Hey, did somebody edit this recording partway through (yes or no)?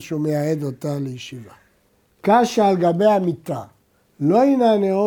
no